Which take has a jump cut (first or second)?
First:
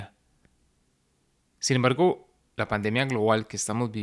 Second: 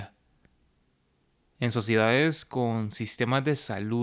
first